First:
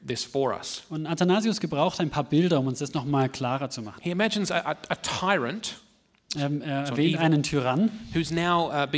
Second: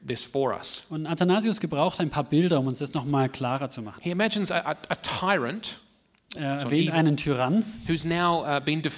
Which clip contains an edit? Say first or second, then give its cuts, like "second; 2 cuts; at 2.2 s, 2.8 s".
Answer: second; 1 cut; at 6.3 s